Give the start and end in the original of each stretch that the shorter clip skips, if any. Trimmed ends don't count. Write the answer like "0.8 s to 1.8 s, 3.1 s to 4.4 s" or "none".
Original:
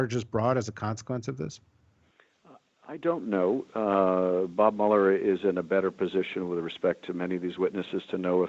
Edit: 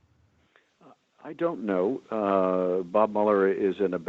none